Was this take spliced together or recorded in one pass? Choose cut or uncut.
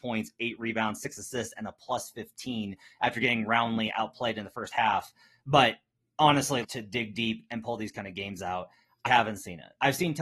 cut